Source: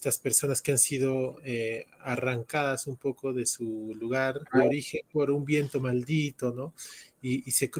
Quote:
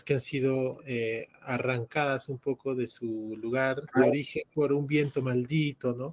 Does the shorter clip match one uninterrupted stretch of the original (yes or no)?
yes